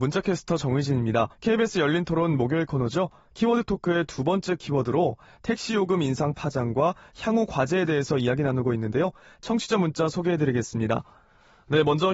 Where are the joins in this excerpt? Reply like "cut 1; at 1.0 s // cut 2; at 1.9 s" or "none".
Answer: cut 1; at 1.3 s